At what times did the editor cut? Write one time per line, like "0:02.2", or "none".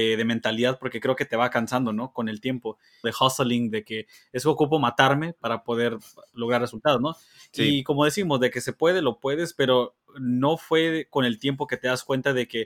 0:03.0